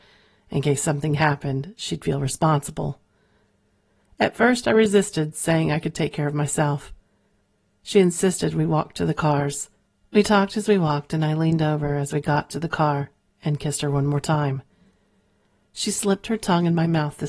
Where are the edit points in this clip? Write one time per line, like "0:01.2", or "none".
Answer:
none

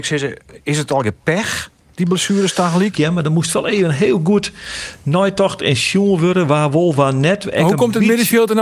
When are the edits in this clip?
0:02.9

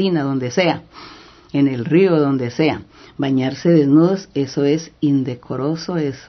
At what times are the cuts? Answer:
none

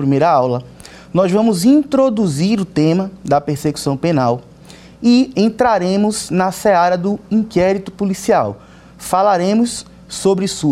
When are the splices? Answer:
0:05.3

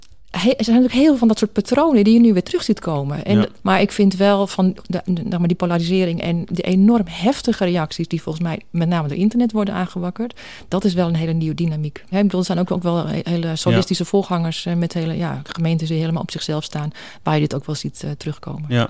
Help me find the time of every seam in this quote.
0:03.6
0:12.1

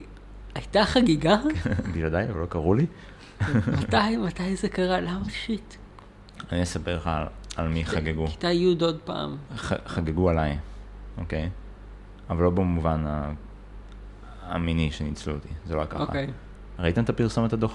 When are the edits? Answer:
none

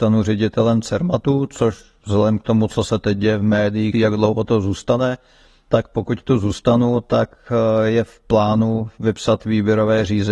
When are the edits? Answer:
0:03.9

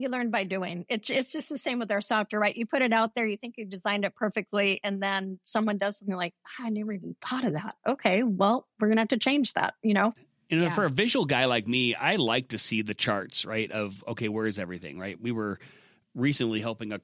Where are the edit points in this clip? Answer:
0:10.2

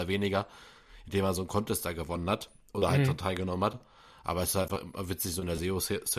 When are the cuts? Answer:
none

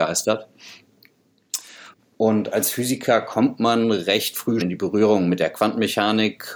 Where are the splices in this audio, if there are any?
0:02.0
0:04.6

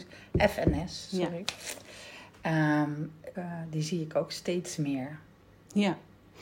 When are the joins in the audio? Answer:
0:03.3

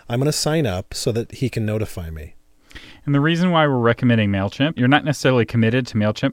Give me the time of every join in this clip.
0:04.8

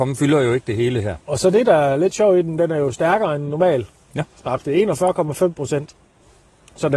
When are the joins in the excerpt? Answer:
0:01.3

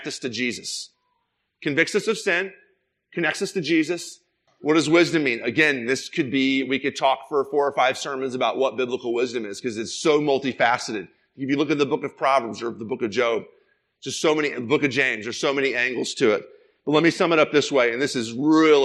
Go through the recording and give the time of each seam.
0:04.5

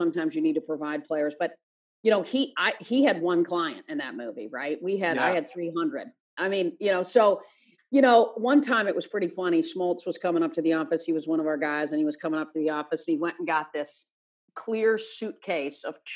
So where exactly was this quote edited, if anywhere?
0:07.8

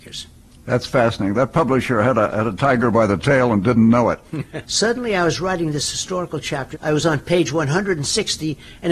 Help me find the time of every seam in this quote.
0:04.6
0:06.7

